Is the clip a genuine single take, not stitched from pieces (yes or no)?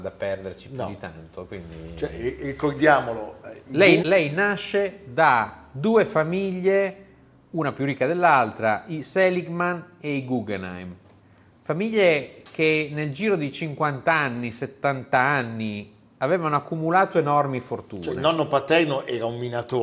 no